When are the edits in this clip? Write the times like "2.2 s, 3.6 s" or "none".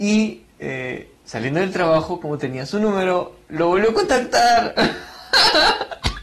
none